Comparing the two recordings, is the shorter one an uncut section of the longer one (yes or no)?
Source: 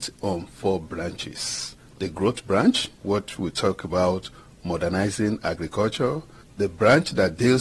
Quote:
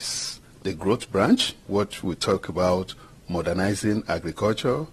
yes